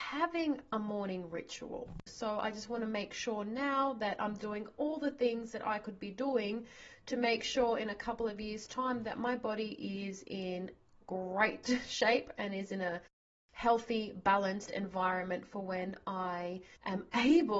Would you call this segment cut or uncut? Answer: cut